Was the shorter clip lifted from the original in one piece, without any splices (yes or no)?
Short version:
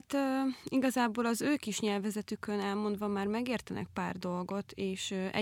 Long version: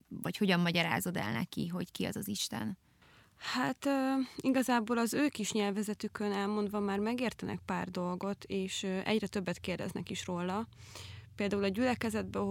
yes